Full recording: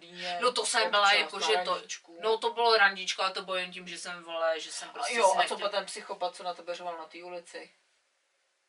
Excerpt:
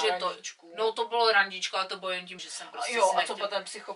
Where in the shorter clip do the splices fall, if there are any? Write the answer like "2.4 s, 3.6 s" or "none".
2.4 s